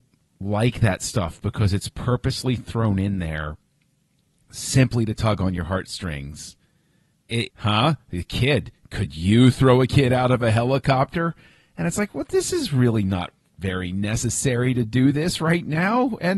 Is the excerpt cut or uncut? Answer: cut